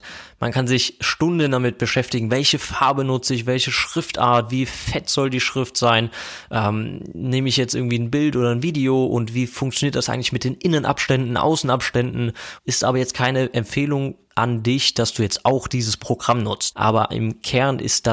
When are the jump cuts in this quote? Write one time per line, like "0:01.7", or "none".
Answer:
0:12.6
0:16.7